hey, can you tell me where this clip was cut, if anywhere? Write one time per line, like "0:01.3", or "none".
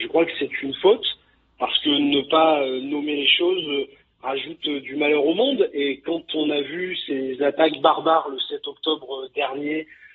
none